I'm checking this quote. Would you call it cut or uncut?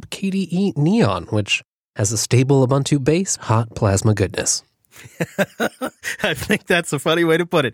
cut